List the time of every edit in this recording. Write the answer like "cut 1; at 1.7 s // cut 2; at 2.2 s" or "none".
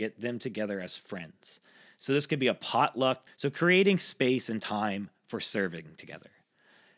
cut 1; at 3.3 s

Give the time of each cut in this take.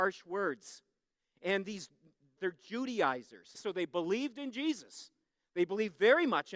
cut 1; at 2.4 s // cut 2; at 3.5 s

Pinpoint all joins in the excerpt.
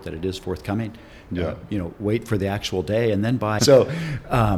cut 1; at 3.6 s

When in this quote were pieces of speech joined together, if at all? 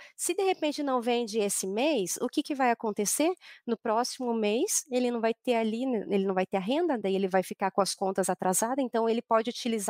none

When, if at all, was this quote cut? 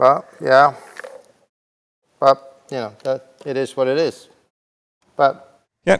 none

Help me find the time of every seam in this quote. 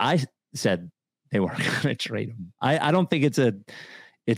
none

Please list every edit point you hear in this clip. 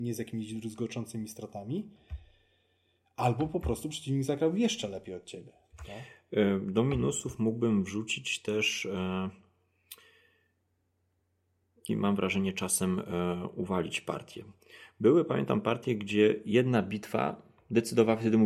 cut 1; at 11.9 s

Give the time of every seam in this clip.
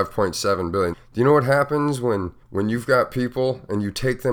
cut 1; at 0.9 s // cut 2; at 2.4 s

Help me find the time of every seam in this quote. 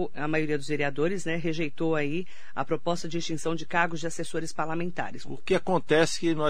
cut 1; at 5.2 s

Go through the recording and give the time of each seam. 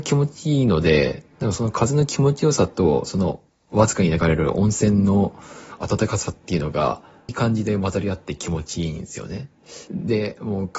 cut 1; at 7.3 s // cut 2; at 9.9 s

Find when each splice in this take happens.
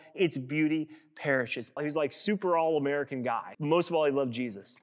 cut 1; at 1.8 s // cut 2; at 3.5 s

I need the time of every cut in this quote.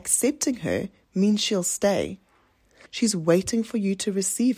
cut 1; at 2.9 s

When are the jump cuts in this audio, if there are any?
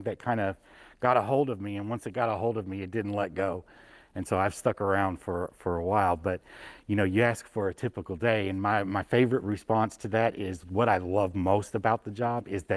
none

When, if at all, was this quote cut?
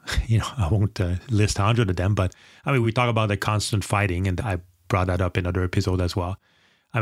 none

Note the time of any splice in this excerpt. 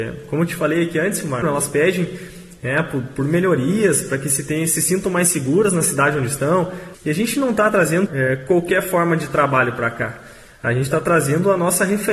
cut 1; at 1.4 s // cut 2; at 6.9 s // cut 3; at 8.1 s

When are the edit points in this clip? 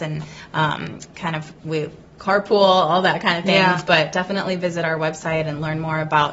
none

